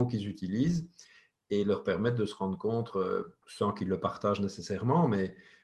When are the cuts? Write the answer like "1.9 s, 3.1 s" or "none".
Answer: 3.4 s